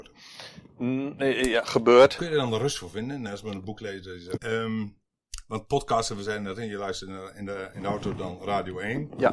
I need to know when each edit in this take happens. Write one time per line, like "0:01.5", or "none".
0:04.4

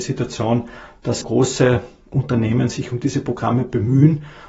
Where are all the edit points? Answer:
0:01.2

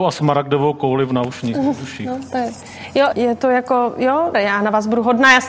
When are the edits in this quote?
0:03.1
0:04.3

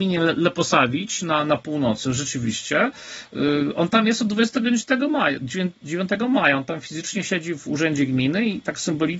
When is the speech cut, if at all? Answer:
none

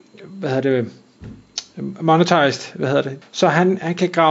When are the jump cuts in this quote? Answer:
0:03.2

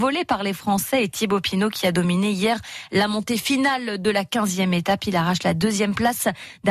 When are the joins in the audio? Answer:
none

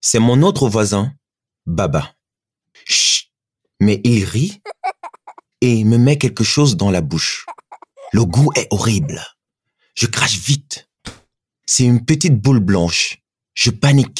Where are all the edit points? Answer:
0:02.7

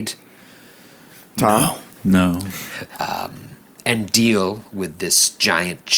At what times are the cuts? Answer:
0:01.9
0:03.0

